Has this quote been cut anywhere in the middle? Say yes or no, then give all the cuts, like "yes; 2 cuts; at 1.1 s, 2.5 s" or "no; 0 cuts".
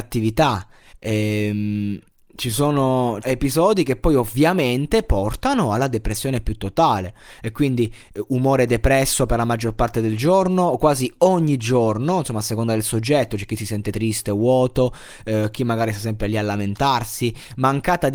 yes; 2 cuts; at 0.9 s, 3.2 s